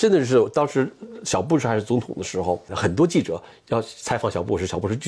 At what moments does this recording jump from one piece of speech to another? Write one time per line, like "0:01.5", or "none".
0:02.7